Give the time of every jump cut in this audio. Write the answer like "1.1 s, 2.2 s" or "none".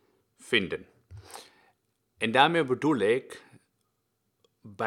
none

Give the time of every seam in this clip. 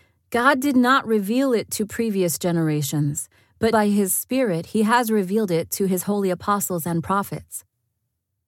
3.7 s

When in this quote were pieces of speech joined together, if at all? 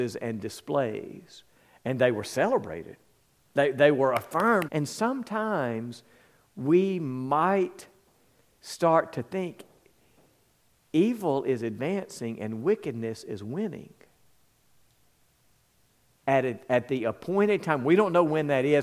4.7 s, 16.2 s

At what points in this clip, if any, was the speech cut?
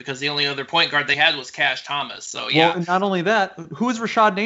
1.1 s

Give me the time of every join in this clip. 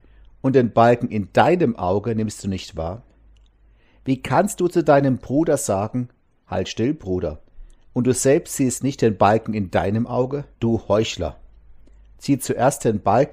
7.9 s, 10.5 s

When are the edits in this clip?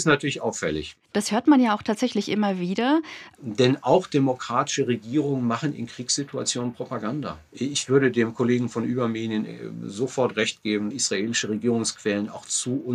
3.3 s, 7.5 s, 10.9 s

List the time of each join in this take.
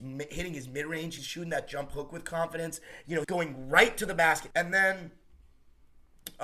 1.2 s, 3.2 s, 4.5 s

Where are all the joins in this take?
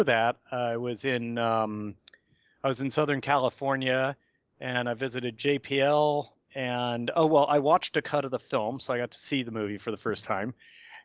none

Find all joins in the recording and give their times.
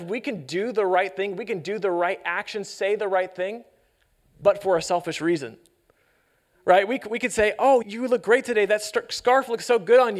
7.8 s

